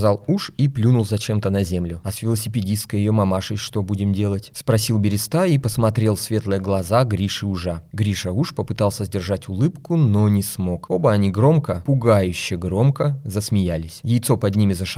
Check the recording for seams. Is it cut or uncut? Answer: uncut